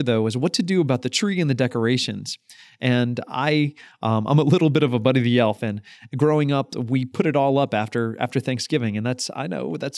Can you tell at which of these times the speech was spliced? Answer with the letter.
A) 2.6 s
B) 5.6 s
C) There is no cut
B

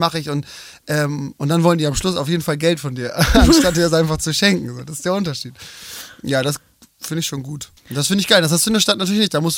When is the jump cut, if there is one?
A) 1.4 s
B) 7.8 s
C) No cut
B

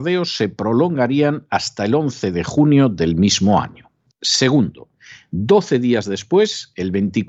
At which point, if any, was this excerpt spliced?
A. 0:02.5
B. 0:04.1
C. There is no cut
B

